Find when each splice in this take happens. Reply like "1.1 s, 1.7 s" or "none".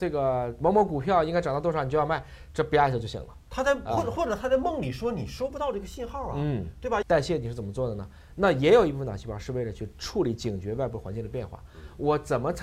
7.0 s